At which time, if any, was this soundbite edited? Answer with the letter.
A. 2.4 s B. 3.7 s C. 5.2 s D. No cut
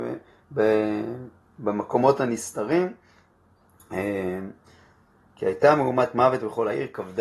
C